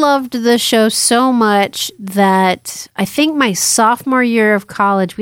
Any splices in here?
no; 0 cuts

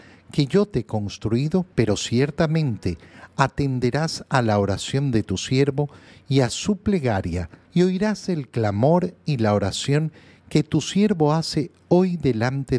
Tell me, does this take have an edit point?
yes; 2 cuts; at 1.7 s, 7.6 s

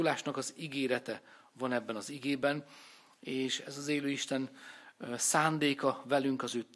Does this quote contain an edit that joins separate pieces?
no; 0 cuts

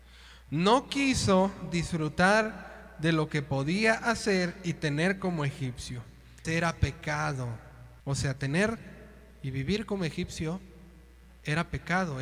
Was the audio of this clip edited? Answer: yes; 2 cuts; at 6.4 s, 8.0 s

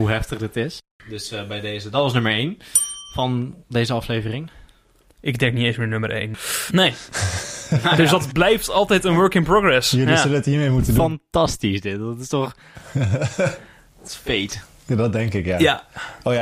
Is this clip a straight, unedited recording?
no; 1 cut; at 6.7 s

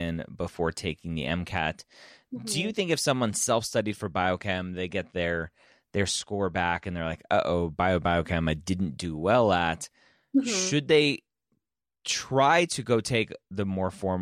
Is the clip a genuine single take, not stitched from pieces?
yes; 0 cuts

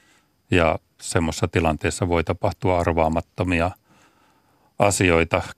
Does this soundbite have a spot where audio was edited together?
no; 0 cuts

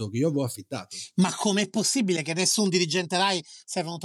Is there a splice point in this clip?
no; 0 cuts

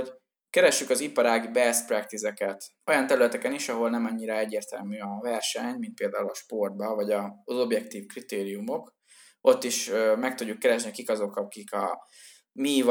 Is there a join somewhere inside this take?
no; 0 cuts

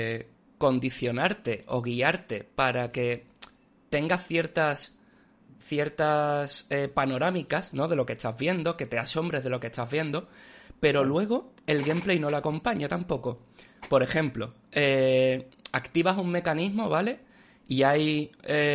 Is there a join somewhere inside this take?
no; 0 cuts

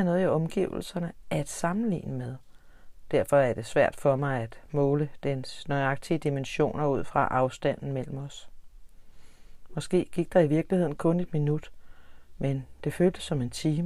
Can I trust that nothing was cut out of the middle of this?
yes; 0 cuts

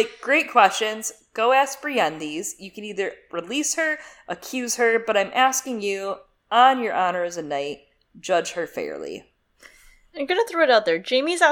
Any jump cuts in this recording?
no; 0 cuts

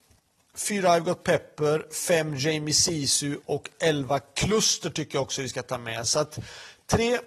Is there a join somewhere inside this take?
no; 0 cuts

